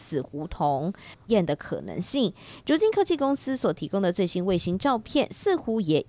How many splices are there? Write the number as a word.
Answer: one